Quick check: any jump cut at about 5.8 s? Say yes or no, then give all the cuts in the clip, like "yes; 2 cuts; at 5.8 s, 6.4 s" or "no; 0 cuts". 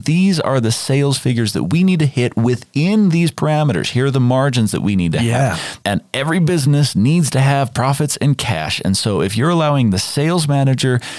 yes; 1 cut; at 5.8 s